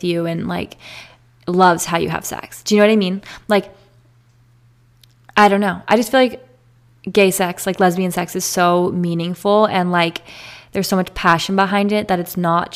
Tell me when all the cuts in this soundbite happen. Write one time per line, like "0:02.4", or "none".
none